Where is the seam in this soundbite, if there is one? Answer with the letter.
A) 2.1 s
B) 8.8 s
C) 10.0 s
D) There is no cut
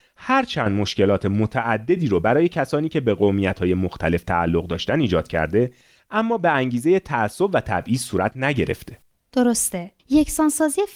C